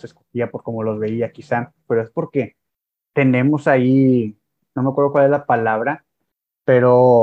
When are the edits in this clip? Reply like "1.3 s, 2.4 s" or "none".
1.9 s